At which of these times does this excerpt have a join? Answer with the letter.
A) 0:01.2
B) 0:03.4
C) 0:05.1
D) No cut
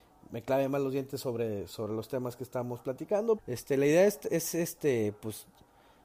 B